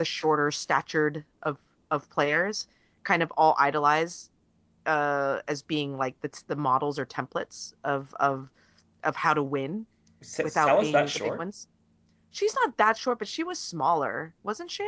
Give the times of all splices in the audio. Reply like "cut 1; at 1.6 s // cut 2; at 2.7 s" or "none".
none